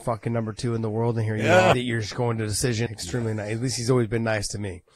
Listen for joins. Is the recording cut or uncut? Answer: cut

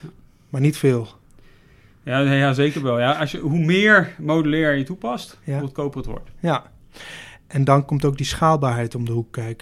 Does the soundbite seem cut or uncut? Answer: uncut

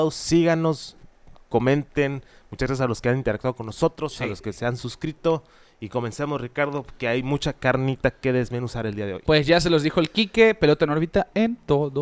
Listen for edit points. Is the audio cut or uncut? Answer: uncut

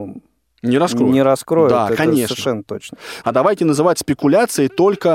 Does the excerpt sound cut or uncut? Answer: cut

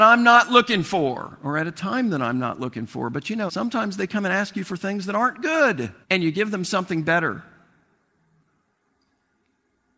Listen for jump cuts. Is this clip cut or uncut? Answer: cut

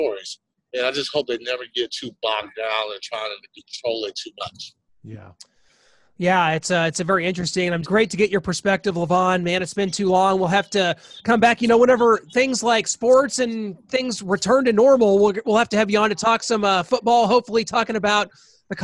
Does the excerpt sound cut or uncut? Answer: cut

